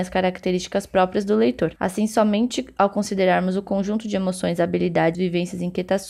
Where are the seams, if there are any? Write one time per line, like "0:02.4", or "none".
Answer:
0:01.8
0:05.1

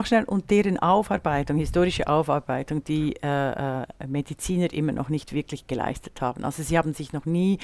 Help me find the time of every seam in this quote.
none

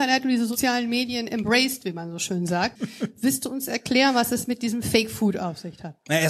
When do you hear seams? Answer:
0:02.8

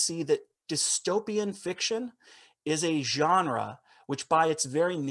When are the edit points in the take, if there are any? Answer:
none

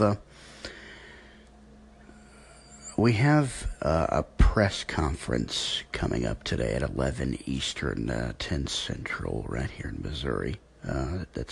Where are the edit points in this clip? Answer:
none

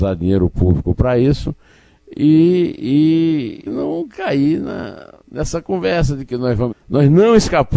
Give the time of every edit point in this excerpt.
0:03.7
0:05.2
0:06.7

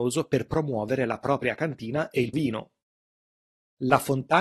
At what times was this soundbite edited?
0:02.3

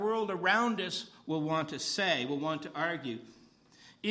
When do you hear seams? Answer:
none

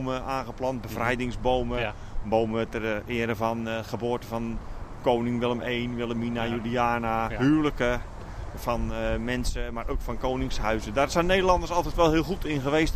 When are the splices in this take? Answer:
none

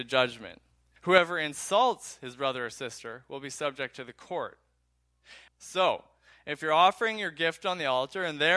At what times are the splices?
0:01.0
0:05.5

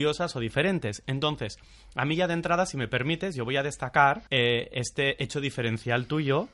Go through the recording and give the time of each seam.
0:04.3

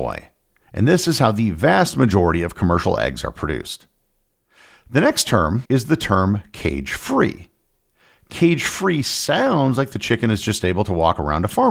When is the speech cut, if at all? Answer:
0:05.7

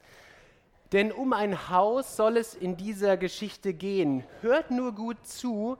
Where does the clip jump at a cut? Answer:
none

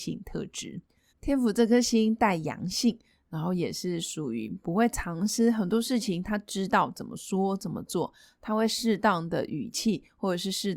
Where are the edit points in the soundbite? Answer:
0:01.1

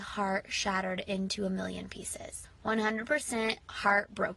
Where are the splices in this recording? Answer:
0:02.4

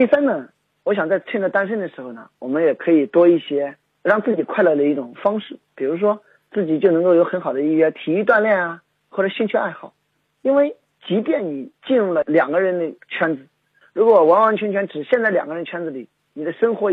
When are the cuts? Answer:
none

